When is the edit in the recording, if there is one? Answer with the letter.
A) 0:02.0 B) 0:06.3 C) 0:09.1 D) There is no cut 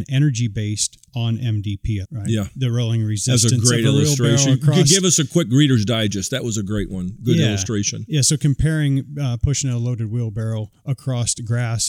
A